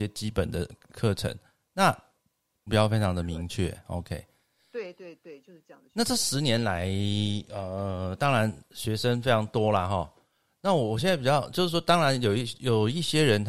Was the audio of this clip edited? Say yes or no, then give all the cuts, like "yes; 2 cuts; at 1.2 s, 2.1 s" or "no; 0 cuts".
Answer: yes; 1 cut; at 2.7 s